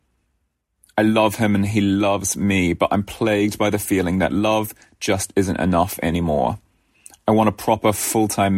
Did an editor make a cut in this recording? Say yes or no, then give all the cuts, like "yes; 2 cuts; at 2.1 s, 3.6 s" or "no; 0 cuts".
no; 0 cuts